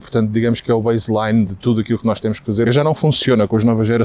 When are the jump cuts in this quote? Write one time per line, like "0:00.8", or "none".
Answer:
0:01.5
0:02.7